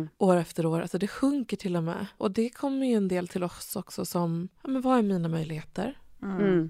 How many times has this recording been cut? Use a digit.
2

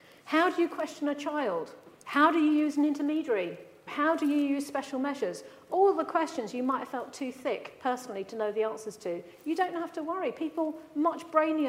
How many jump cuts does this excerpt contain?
1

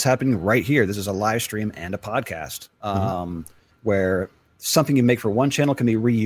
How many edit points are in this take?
1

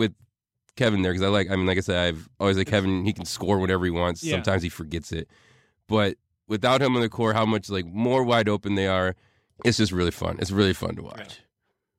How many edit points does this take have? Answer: 1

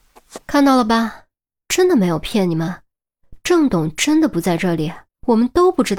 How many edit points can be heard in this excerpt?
1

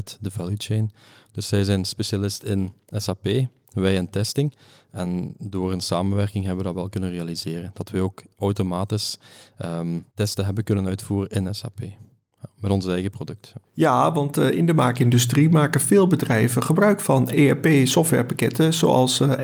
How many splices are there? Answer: 1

